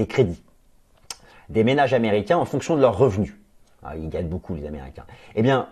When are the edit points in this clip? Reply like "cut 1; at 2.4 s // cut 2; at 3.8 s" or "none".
none